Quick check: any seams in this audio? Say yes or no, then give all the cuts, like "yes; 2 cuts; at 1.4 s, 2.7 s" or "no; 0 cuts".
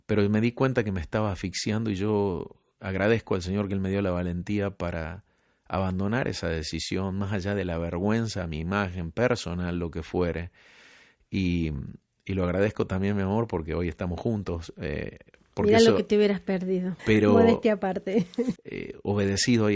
yes; 2 cuts; at 17.0 s, 18.6 s